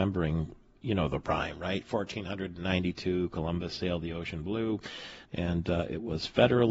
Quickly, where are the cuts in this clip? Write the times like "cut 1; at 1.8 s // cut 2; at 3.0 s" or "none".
cut 1; at 5.2 s